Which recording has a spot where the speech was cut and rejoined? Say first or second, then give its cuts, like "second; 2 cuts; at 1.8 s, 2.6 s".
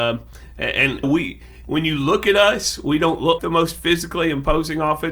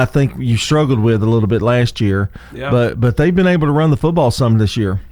first; 2 cuts; at 1.0 s, 3.4 s